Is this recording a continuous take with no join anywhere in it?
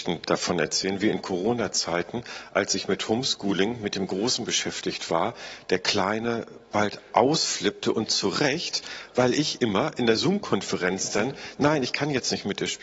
yes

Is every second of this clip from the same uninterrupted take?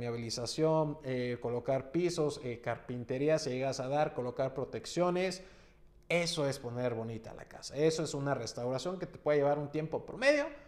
yes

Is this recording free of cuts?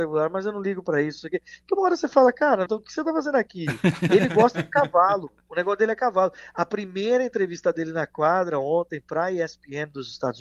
no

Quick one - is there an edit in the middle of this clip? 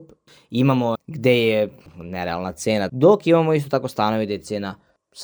yes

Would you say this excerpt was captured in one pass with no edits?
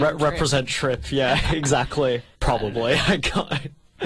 no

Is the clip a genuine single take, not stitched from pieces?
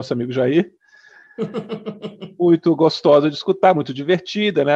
yes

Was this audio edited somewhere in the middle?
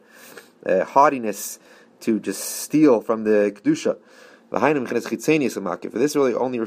no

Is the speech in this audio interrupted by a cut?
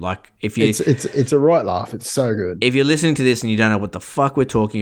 no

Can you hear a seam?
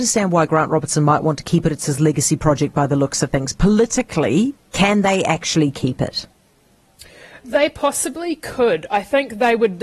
no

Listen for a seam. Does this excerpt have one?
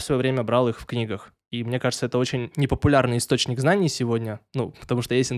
no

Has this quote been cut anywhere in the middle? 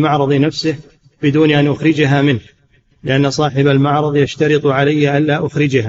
no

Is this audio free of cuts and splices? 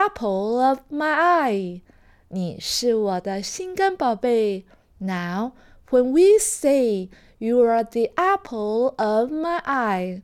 no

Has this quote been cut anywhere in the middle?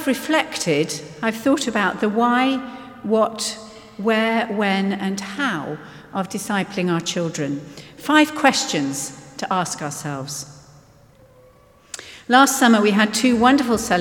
no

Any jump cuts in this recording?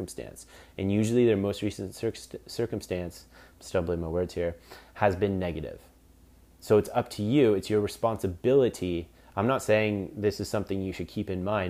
no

